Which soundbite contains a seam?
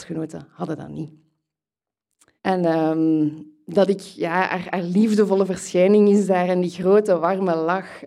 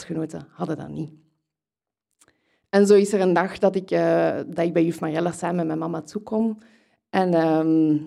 first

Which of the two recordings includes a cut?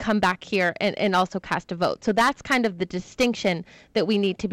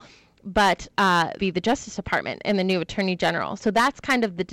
second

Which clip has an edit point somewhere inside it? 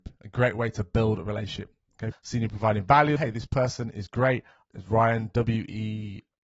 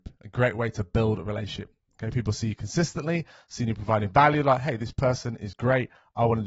first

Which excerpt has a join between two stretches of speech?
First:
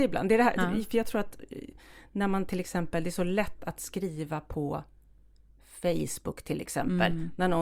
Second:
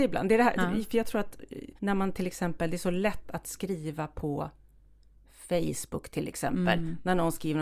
second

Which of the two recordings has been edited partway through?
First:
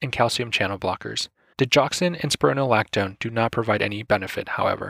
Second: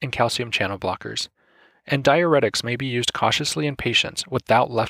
first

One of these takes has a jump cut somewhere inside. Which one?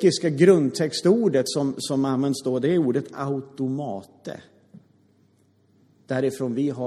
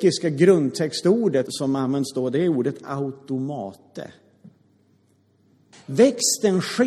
second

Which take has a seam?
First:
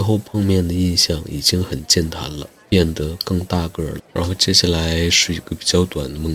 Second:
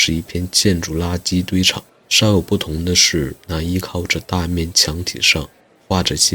first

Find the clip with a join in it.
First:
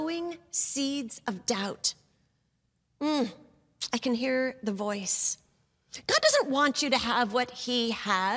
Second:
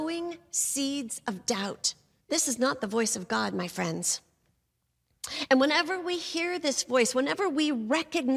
second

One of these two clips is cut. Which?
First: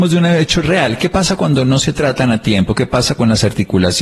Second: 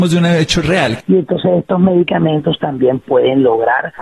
second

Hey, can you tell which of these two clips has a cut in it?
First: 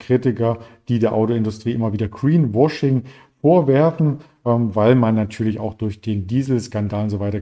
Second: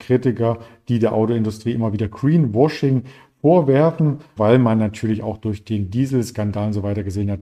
second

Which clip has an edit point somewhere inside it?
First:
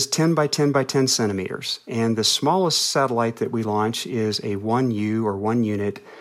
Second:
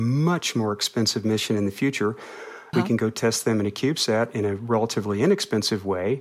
second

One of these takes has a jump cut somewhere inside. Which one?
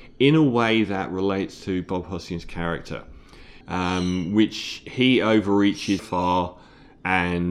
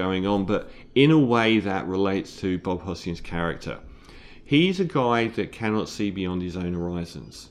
first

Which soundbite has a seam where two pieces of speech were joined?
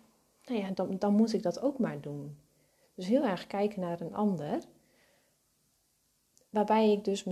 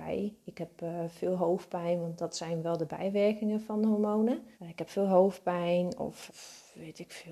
second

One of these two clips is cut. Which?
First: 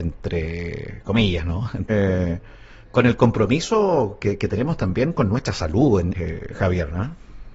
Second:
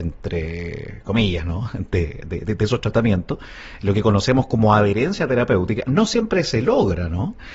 first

